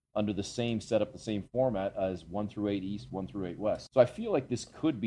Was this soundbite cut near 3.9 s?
yes; 1 cut; at 3.9 s

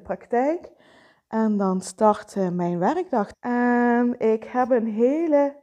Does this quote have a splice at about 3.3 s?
yes; 1 cut; at 3.3 s

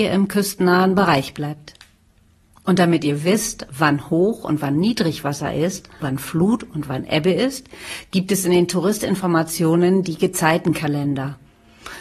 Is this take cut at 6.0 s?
yes; 1 cut; at 6.0 s

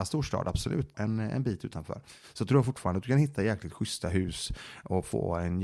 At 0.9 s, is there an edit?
yes; 1 cut; at 0.9 s

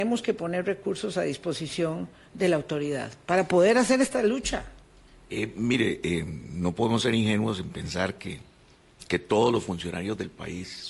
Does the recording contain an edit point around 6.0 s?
no; 0 cuts

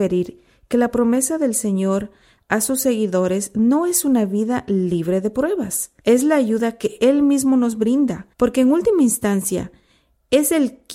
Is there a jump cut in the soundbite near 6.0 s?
yes; 2 cuts; at 6.0 s, 8.3 s

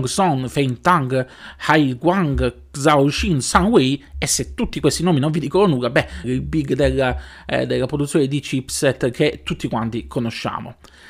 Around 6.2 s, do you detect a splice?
yes; 1 cut; at 6.2 s

